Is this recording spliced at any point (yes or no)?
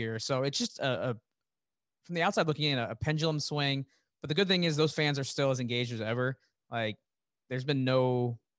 no